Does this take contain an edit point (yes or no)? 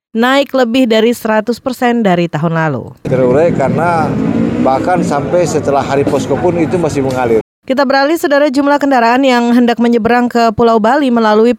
yes